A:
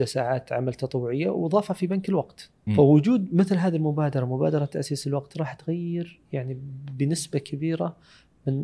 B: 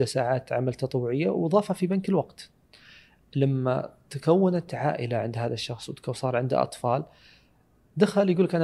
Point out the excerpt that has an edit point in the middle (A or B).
A